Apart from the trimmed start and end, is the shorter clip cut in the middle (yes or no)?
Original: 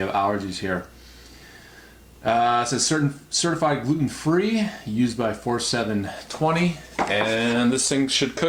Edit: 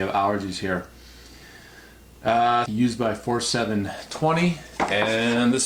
yes